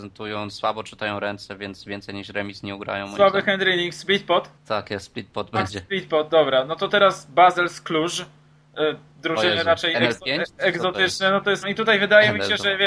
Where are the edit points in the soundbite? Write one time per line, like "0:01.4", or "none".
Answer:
0:04.6
0:11.6